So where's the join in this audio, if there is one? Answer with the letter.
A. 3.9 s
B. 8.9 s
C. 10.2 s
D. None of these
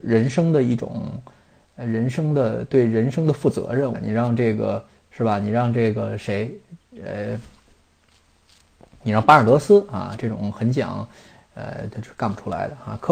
A